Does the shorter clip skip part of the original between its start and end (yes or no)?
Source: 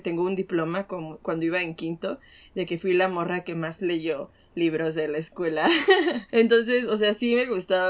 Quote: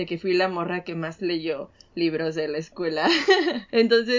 no